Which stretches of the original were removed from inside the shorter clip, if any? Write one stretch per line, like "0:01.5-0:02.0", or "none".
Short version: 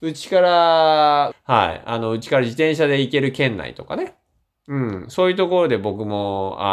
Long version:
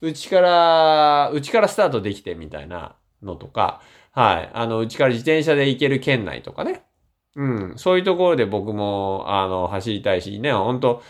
0:01.3-0:04.0